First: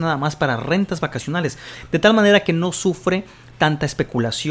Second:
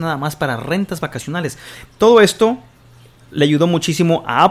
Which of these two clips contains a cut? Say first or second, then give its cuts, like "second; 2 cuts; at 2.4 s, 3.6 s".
second; 1 cut; at 1.8 s